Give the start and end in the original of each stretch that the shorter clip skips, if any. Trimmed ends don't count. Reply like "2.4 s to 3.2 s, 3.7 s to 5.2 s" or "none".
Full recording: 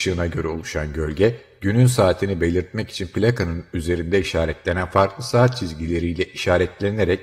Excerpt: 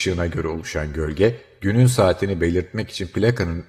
none